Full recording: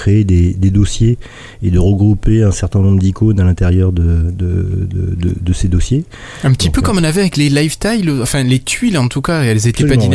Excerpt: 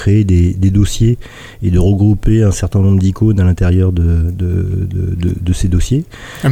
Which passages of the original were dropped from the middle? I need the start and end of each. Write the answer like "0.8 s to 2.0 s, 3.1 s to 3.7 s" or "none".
none